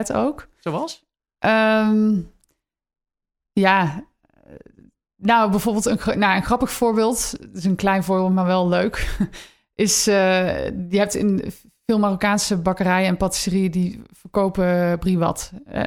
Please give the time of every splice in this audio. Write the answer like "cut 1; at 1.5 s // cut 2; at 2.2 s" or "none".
none